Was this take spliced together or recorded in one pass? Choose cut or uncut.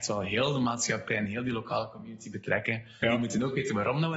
cut